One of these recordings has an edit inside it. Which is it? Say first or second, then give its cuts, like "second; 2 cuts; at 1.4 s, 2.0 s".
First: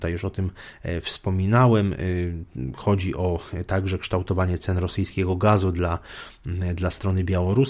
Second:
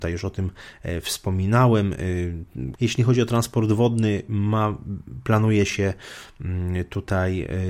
second; 1 cut; at 2.7 s